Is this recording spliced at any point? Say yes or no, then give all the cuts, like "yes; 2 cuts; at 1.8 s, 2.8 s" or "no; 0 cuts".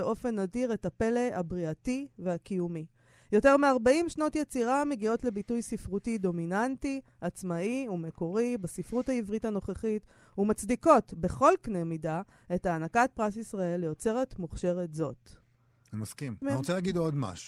yes; 1 cut; at 16.4 s